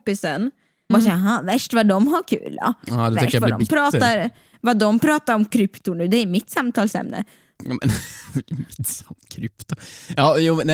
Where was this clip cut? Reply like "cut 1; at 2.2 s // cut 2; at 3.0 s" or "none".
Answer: cut 1; at 0.9 s